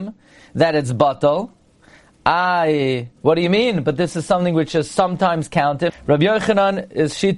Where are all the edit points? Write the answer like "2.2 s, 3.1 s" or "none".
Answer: 3.2 s, 5.9 s

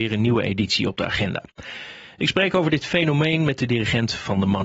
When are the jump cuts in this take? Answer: none

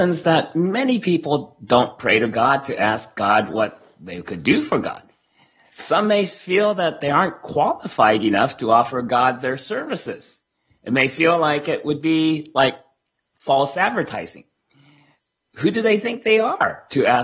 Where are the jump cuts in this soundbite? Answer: none

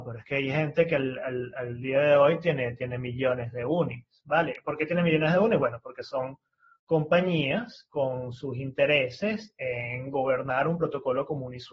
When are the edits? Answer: none

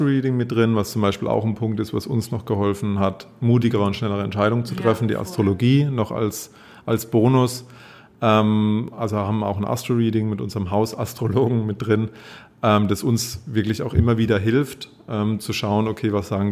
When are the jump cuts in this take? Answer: none

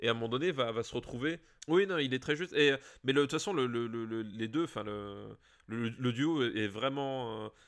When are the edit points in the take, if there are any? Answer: 1.6 s

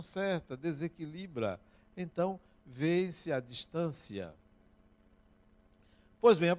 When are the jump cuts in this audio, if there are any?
none

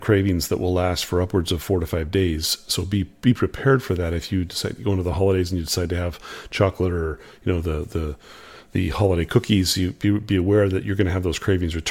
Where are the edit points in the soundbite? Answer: none

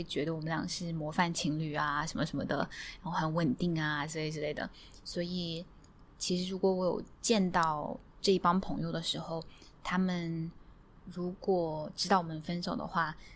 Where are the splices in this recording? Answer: 11.0 s

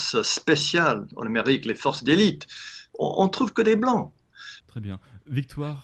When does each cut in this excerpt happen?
4.6 s

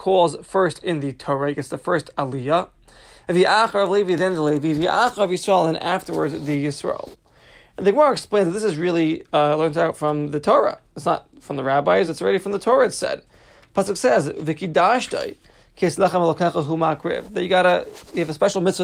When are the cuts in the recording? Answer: none

